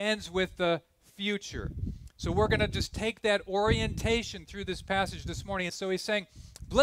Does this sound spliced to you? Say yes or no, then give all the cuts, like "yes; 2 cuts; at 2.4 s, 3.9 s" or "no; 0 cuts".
yes; 1 cut; at 5.7 s